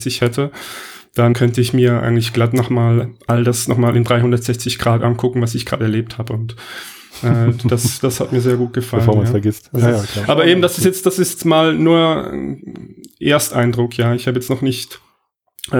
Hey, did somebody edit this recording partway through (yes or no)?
yes